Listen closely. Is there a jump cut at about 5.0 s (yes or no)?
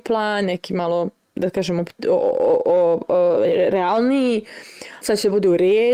yes